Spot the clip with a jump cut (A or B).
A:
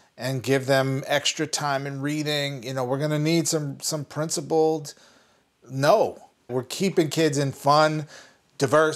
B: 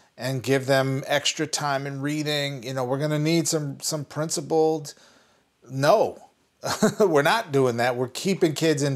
A